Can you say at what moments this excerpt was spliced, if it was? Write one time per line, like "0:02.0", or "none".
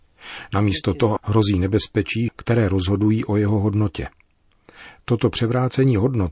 0:01.2
0:02.3